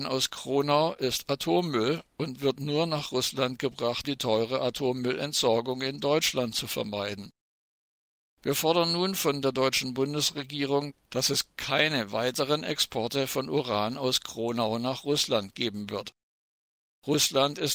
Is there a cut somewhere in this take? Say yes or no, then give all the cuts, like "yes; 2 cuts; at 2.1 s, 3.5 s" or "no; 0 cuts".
yes; 1 cut; at 4.0 s